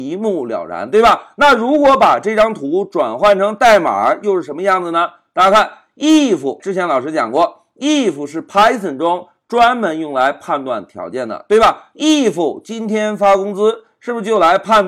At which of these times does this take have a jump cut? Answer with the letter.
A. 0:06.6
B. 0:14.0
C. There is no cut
A